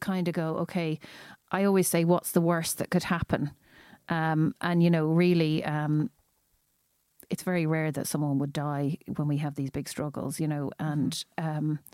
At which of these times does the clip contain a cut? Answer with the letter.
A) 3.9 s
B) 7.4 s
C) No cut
C